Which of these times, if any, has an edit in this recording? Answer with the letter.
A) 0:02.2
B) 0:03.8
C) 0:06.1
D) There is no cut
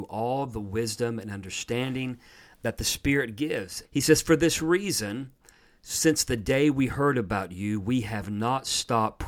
B